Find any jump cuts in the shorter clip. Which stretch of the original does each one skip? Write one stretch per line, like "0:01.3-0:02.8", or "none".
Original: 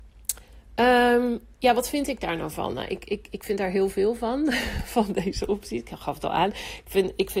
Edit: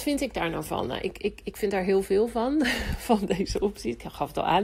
none